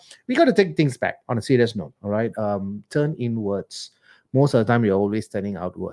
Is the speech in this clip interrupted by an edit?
no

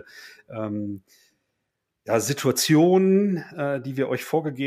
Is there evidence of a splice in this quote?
no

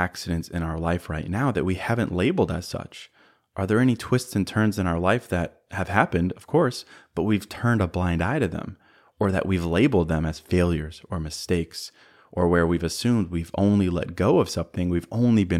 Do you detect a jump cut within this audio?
no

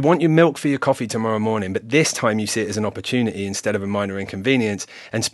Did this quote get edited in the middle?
no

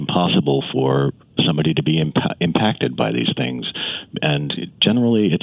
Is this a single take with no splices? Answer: yes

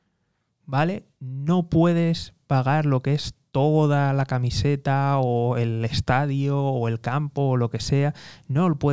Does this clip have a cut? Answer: no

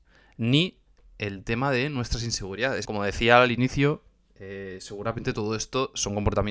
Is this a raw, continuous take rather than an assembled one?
no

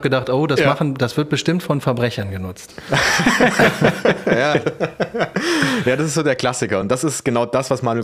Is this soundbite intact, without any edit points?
yes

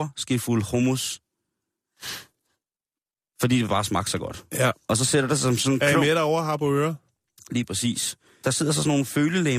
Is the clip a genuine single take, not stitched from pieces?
yes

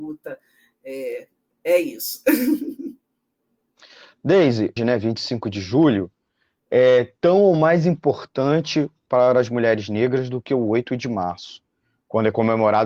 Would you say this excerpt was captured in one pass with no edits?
no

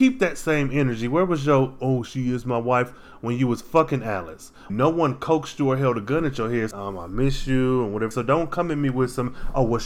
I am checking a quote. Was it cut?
yes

